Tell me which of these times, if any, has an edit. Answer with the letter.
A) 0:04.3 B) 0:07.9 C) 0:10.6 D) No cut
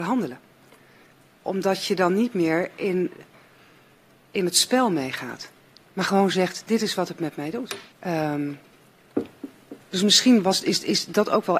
B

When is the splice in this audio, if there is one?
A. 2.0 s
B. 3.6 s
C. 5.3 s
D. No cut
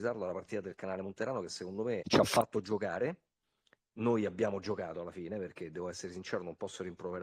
A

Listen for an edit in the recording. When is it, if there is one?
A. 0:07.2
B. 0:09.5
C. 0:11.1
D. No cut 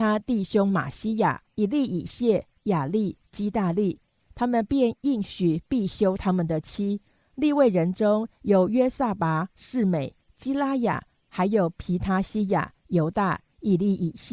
A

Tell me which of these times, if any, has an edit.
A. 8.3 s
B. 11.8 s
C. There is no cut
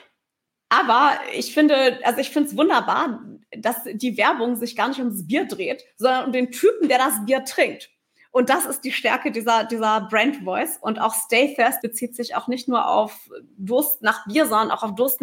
B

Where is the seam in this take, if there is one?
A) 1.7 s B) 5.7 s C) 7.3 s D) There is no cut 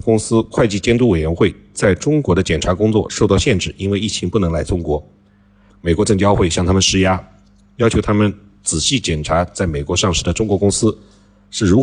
B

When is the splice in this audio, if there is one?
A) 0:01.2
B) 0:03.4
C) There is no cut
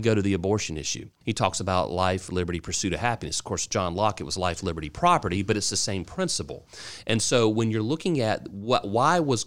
A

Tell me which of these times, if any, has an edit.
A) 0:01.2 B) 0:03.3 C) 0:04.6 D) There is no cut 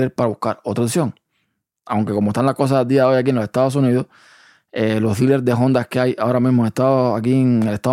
D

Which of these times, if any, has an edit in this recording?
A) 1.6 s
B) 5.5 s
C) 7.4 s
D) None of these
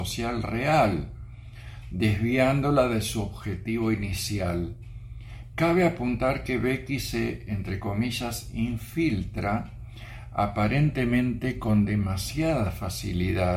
B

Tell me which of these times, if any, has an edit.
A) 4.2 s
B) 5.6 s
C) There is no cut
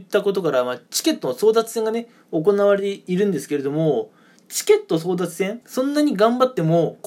B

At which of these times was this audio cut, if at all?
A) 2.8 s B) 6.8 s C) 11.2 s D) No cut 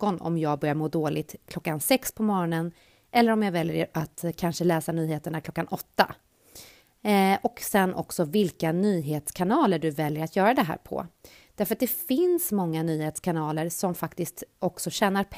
B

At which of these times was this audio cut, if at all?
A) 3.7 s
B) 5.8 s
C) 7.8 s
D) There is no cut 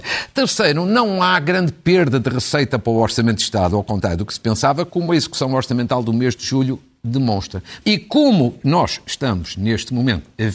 C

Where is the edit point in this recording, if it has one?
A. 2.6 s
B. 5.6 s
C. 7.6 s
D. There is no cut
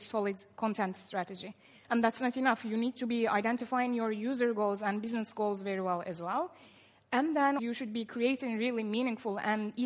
C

